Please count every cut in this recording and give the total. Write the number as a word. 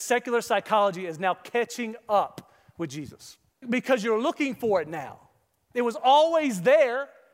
one